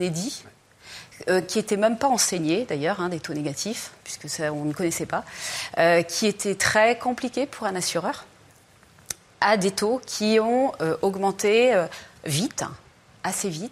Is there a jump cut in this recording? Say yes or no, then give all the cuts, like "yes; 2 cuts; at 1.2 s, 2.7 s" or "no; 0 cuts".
no; 0 cuts